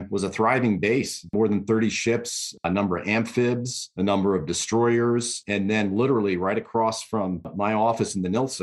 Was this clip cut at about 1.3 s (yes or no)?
no